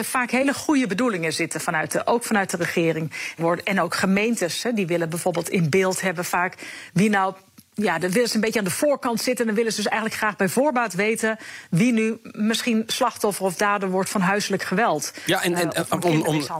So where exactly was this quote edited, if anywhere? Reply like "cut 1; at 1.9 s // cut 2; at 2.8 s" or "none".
cut 1; at 3.4 s